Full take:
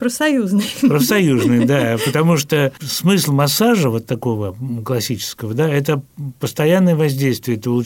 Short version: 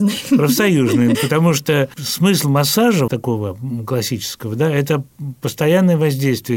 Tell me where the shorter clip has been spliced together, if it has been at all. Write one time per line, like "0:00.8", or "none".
0:01.1
0:03.1